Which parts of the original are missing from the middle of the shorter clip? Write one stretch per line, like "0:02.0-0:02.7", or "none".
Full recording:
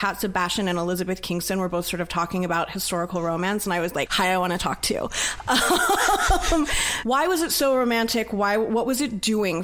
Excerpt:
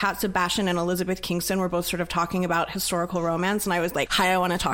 none